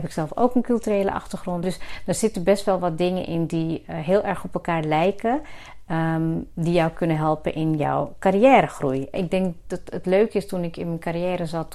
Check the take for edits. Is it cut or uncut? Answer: cut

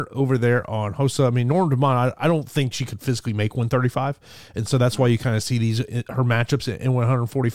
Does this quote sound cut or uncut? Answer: uncut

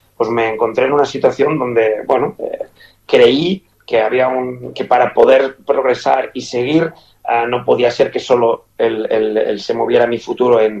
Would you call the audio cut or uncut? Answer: uncut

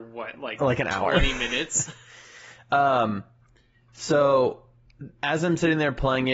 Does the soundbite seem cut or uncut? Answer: uncut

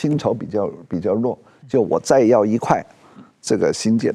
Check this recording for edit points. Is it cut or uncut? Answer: uncut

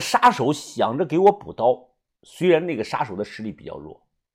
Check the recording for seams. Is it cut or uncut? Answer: uncut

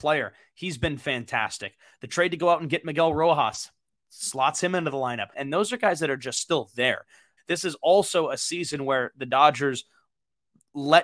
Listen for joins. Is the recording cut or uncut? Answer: cut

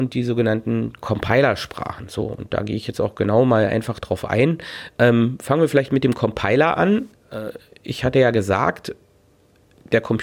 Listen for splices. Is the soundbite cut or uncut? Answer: uncut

